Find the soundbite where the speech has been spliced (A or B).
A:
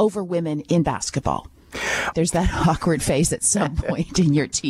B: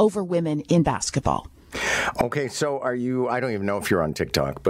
A